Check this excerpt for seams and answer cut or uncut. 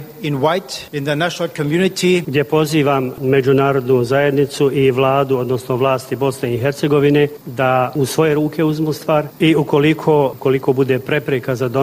uncut